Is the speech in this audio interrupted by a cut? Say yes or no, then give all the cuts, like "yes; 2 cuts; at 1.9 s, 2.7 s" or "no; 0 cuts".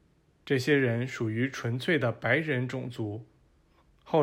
no; 0 cuts